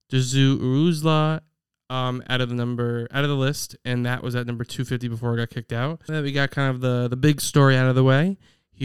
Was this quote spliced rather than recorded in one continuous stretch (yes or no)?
yes